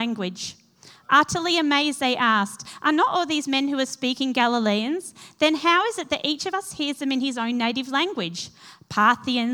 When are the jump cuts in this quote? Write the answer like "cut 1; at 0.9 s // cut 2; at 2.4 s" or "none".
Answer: none